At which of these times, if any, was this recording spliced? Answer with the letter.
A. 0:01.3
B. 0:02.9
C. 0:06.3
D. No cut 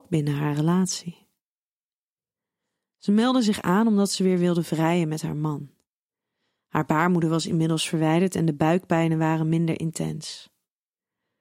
D